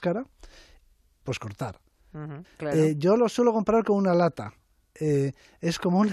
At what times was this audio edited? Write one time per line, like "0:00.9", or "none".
0:01.2
0:02.4